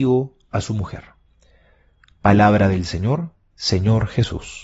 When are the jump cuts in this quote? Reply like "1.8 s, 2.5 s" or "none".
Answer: 3.5 s